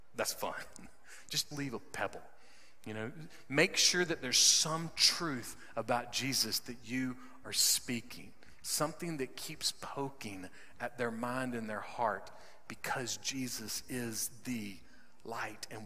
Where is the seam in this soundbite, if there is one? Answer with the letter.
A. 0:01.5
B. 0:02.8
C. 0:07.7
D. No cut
A